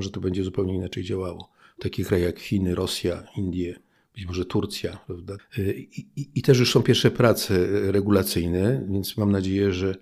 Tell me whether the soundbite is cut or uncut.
cut